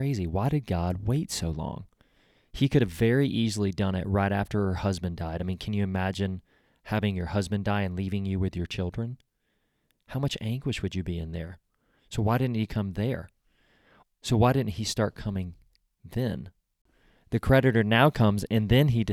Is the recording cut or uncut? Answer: cut